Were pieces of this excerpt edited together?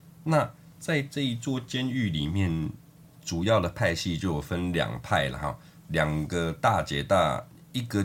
no; 0 cuts

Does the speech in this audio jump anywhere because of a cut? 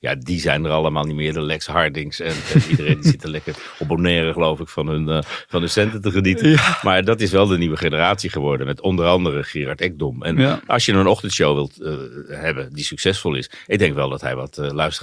no; 0 cuts

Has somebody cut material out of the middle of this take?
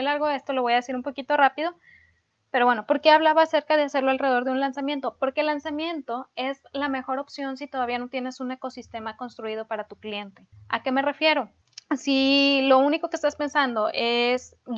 no; 0 cuts

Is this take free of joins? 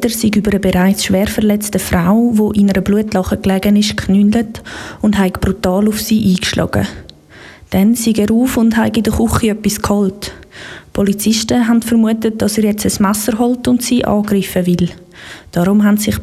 yes; 0 cuts

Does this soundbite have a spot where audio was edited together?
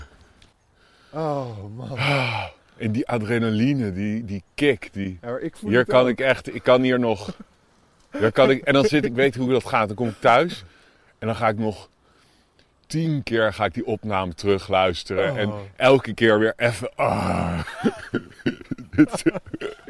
no; 0 cuts

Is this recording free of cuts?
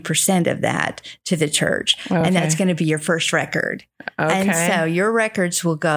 yes; 0 cuts

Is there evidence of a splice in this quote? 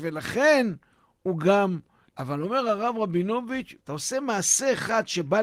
yes; 2 cuts; at 2.0 s, 3.8 s

